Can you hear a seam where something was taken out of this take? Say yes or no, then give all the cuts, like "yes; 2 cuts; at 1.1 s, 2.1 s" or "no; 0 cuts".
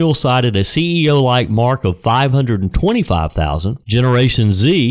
yes; 1 cut; at 3.8 s